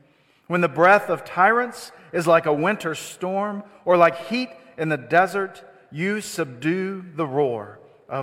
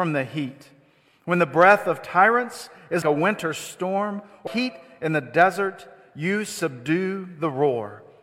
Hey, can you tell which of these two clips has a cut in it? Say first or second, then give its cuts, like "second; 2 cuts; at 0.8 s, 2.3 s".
second; 2 cuts; at 3.0 s, 4.5 s